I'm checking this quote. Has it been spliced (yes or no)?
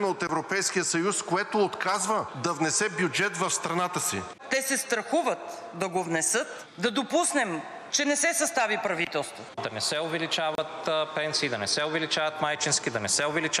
yes